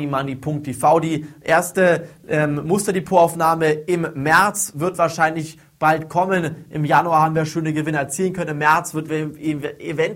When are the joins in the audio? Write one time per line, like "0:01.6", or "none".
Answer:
0:07.5
0:09.1